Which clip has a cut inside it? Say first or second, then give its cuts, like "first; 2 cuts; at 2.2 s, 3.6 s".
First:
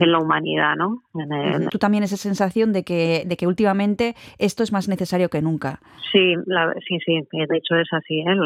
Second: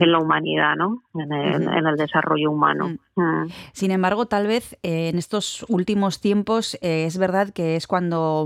first; 1 cut; at 1.7 s